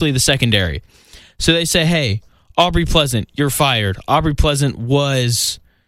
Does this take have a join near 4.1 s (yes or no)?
no